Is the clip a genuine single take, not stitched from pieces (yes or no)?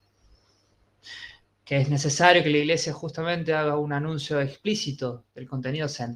no